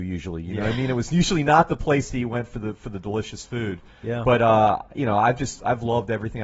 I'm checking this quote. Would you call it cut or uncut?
uncut